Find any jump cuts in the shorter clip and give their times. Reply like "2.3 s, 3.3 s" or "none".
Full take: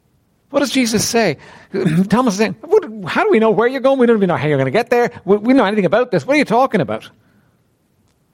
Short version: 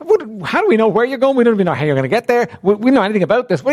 none